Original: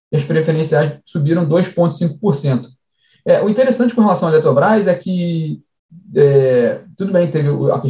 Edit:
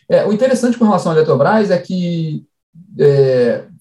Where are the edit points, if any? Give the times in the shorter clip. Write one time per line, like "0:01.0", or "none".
none